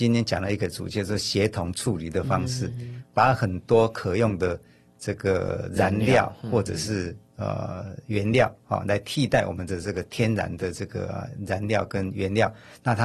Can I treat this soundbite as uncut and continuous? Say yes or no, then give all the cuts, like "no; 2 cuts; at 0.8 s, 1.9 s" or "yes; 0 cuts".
yes; 0 cuts